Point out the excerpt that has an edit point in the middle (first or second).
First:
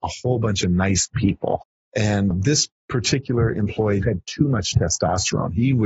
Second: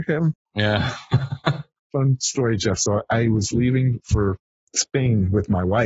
first